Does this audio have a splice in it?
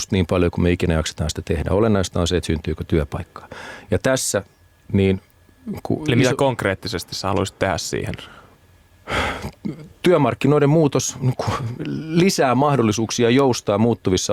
no; 0 cuts

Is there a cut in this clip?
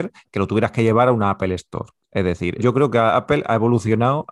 yes; 1 cut; at 2.6 s

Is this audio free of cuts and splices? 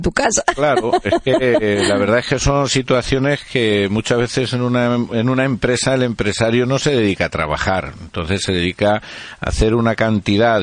yes; 0 cuts

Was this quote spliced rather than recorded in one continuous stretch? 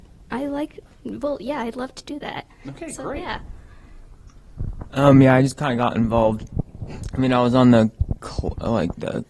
no; 0 cuts

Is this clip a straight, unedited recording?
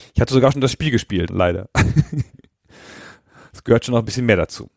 no; 1 cut; at 1.3 s

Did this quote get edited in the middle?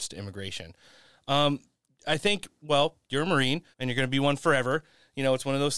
yes; 1 cut; at 3.7 s

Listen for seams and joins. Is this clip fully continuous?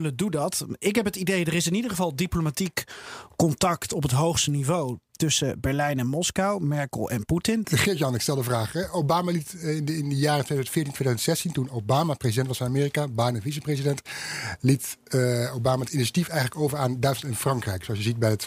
no; 1 cut; at 7.6 s

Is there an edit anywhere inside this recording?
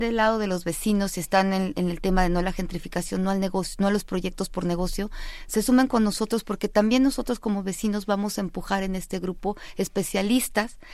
no; 0 cuts

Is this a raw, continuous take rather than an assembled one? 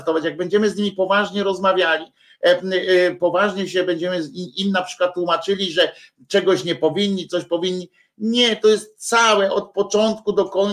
yes; 0 cuts

